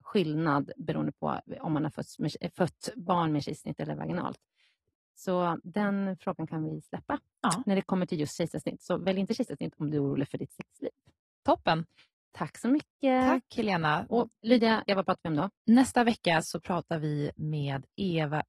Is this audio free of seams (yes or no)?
no